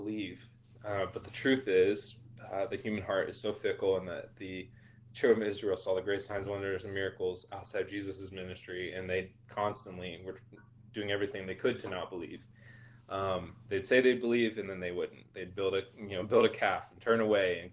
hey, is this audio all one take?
yes; 0 cuts

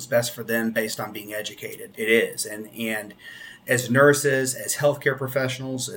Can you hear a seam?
yes; 1 cut; at 1.9 s

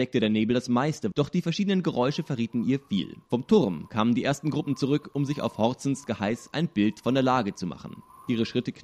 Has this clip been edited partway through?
yes; 1 cut; at 1.1 s

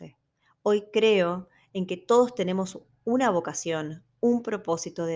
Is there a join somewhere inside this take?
no; 0 cuts

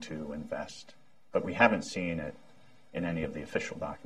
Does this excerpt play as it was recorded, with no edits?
yes; 0 cuts

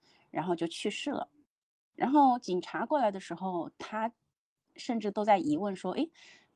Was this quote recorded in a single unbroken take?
yes; 0 cuts

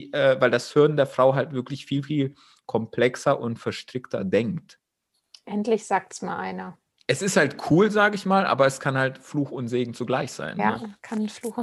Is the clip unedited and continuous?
yes; 0 cuts

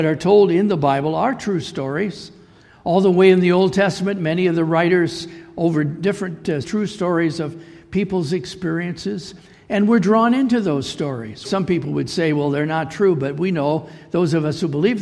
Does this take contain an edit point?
yes; 2 cuts; at 6.6 s, 11.4 s

